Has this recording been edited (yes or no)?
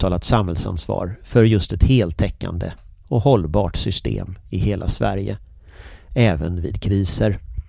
no